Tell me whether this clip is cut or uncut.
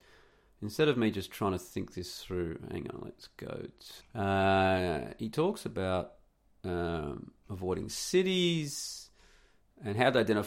cut